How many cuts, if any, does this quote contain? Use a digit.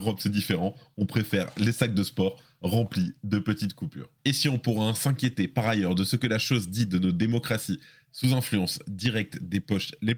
1